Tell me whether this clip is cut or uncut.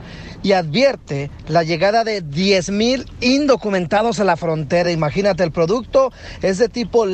uncut